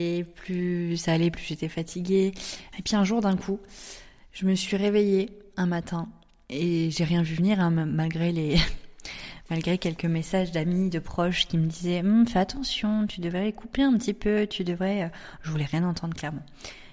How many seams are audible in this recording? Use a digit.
1